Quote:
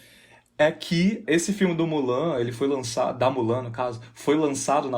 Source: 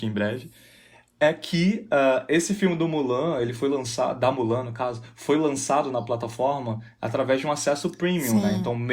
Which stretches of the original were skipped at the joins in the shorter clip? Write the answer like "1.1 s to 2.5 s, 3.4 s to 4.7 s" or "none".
1.9 s to 2.3 s